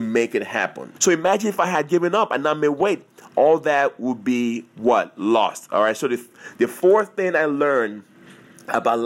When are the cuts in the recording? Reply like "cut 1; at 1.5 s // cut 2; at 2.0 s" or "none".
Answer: cut 1; at 1.0 s